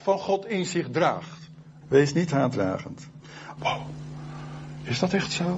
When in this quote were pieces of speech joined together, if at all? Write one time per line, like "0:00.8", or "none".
0:01.8
0:03.6